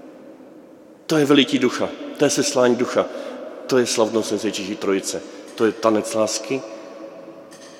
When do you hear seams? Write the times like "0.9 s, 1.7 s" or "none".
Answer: none